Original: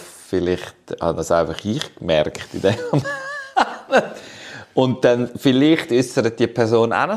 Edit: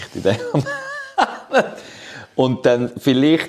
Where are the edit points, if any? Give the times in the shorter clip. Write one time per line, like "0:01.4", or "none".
none